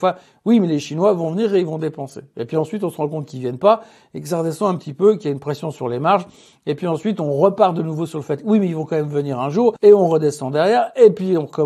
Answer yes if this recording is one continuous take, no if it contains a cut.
yes